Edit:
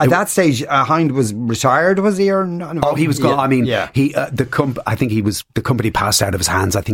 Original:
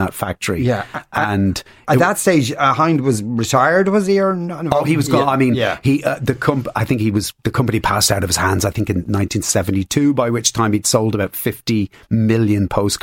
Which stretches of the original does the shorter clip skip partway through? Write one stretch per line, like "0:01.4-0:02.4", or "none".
none